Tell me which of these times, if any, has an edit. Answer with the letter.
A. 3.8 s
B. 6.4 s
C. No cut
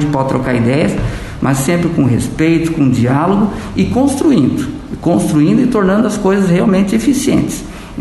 C